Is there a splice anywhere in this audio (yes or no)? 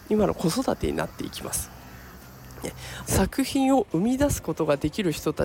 yes